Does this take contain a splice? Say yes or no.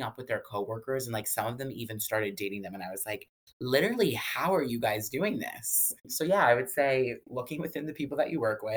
no